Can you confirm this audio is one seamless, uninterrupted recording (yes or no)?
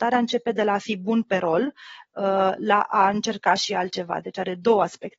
yes